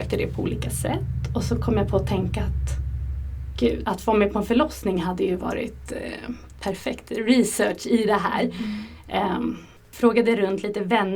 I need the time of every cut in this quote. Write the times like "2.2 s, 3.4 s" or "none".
3.8 s